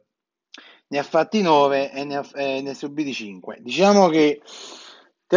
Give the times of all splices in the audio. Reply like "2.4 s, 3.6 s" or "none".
none

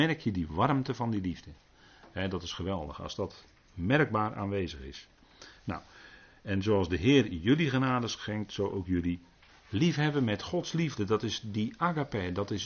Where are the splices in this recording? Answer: 9.5 s

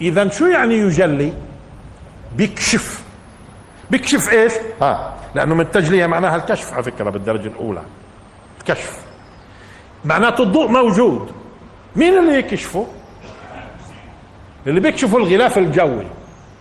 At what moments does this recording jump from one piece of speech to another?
none

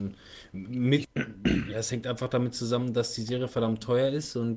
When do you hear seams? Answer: 1.0 s

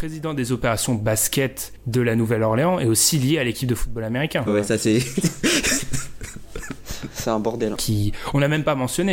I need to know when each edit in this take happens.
4.5 s, 7.7 s

